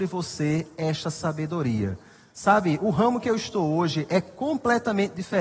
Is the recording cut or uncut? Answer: uncut